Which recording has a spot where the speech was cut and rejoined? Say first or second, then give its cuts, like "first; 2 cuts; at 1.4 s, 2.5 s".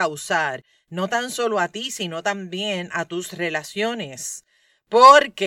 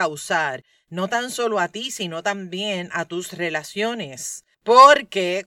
second; 1 cut; at 4.5 s